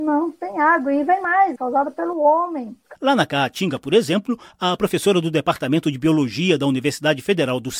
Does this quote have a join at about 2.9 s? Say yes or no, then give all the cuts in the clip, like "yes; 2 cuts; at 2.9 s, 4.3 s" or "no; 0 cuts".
yes; 2 cuts; at 1.6 s, 2.9 s